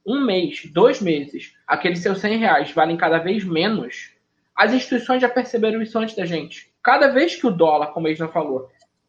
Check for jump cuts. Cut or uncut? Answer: cut